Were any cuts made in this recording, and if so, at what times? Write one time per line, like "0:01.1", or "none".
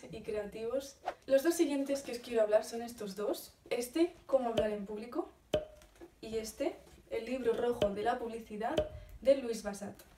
0:01.2